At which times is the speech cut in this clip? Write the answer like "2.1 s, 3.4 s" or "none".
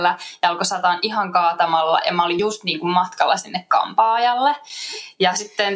none